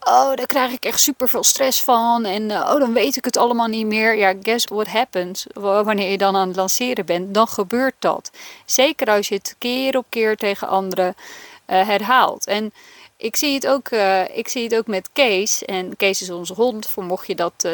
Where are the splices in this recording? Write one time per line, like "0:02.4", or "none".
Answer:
0:04.7